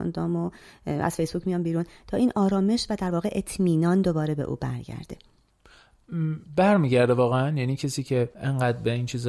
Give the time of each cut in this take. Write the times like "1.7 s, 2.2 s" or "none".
8.3 s